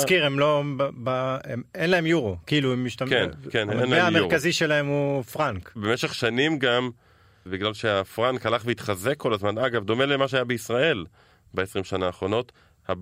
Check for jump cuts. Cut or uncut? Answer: cut